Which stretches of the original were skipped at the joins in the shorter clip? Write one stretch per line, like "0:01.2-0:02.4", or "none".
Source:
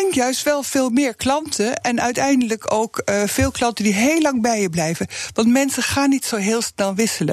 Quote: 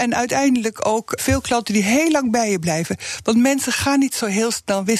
0:03.0-0:03.3